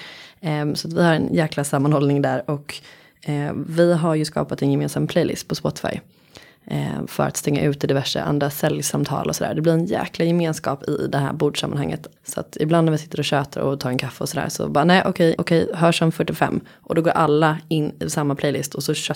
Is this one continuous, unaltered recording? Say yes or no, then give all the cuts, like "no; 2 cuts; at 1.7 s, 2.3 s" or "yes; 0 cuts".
no; 2 cuts; at 12.2 s, 15.4 s